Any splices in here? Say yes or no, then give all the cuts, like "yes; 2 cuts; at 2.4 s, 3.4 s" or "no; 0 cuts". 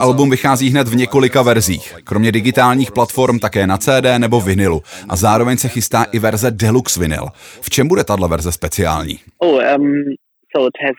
no; 0 cuts